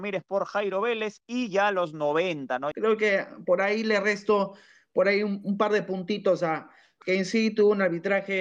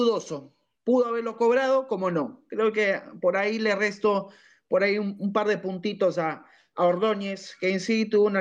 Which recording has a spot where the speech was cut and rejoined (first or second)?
first